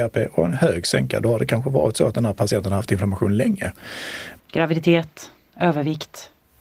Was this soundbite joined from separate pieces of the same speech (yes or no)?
yes